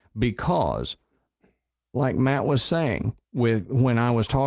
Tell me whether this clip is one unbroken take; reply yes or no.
yes